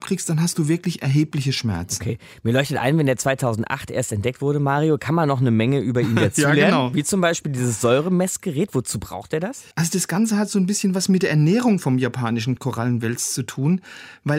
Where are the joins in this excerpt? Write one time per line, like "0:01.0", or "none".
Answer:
0:09.7